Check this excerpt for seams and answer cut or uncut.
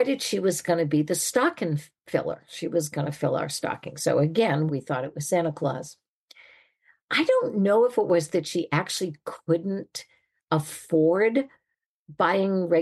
cut